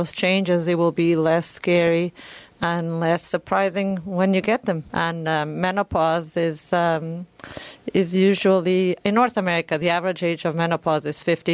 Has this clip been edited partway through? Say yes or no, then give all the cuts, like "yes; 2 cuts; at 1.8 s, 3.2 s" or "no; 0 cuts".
yes; 2 cuts; at 4.9 s, 9.0 s